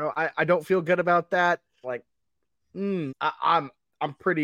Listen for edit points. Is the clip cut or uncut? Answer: cut